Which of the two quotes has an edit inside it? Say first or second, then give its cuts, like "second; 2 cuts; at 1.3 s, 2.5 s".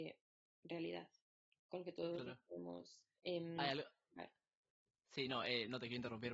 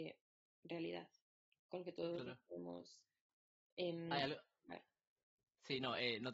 first; 1 cut; at 3.2 s